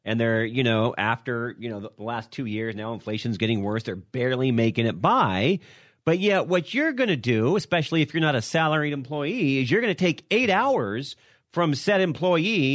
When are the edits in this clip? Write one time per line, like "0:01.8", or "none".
none